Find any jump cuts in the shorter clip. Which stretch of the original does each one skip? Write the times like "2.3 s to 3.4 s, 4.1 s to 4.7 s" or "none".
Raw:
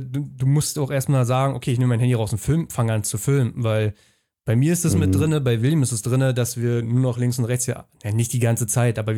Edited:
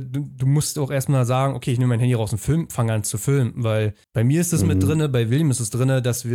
4.0 s to 4.4 s